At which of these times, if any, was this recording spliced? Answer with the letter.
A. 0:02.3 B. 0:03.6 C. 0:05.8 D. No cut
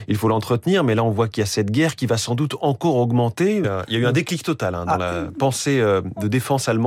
B